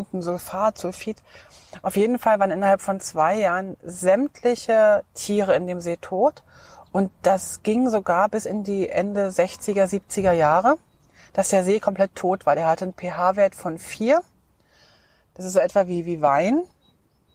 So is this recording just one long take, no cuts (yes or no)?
yes